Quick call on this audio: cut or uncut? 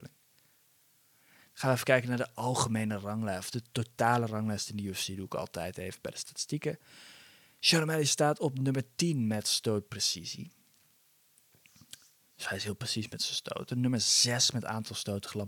uncut